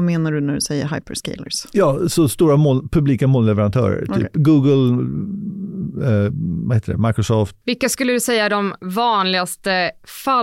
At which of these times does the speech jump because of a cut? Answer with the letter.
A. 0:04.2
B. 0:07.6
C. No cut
B